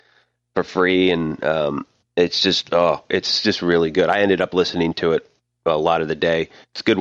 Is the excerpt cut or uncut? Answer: uncut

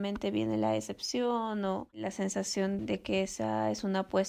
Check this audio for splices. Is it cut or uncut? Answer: cut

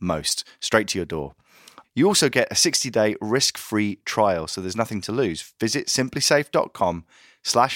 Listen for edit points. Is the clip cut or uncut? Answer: cut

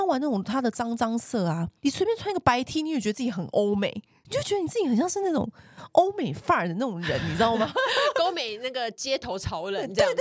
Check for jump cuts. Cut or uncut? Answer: uncut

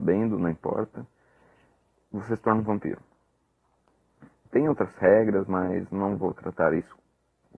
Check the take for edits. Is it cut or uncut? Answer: cut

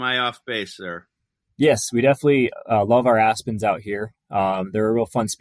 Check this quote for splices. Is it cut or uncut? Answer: uncut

